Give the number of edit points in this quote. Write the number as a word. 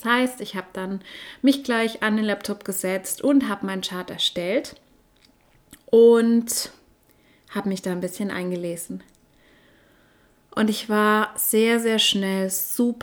zero